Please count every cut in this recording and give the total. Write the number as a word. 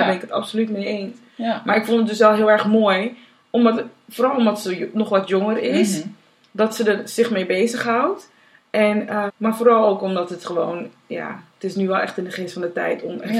one